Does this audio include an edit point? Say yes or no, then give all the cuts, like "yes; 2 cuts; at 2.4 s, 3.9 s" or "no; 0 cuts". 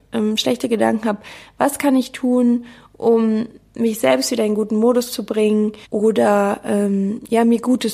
yes; 1 cut; at 5.8 s